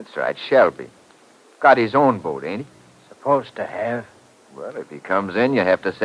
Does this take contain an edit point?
no; 0 cuts

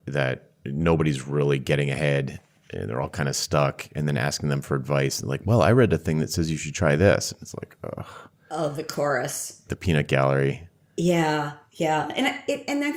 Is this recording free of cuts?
no; 1 cut; at 9.7 s

